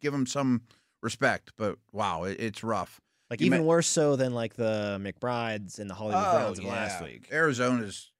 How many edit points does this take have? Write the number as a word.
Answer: one